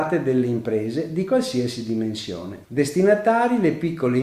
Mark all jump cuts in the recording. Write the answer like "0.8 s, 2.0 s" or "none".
2.6 s